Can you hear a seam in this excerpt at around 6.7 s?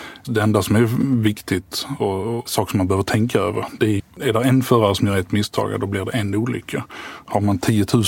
no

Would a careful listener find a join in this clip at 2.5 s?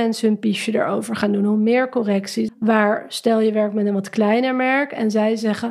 yes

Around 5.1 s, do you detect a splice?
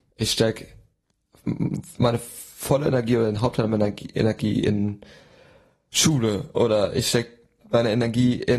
no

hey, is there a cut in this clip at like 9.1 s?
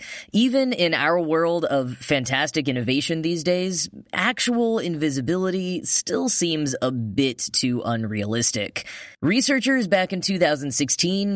yes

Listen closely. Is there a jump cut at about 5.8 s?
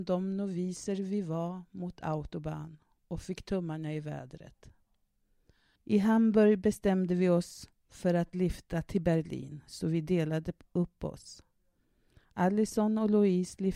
yes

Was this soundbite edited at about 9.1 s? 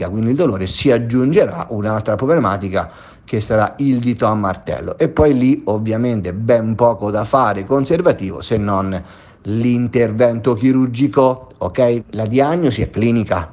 no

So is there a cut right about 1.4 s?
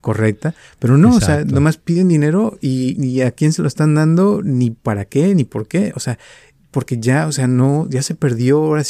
no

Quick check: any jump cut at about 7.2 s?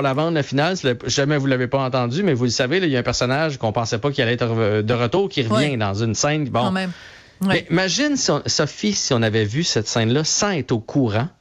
no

